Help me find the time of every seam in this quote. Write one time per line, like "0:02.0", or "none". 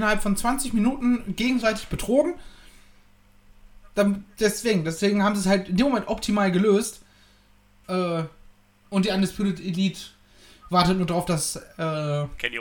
0:07.8